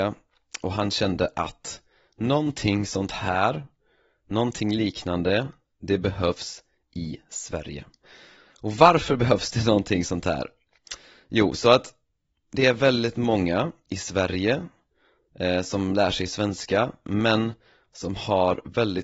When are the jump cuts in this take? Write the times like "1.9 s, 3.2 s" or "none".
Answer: none